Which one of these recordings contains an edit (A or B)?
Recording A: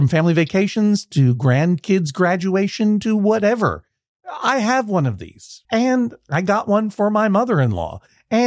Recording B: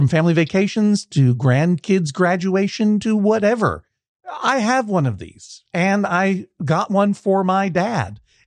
A